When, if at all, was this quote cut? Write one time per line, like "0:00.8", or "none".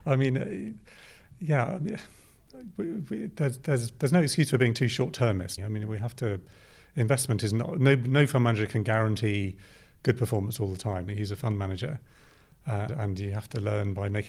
0:05.6
0:11.1
0:12.9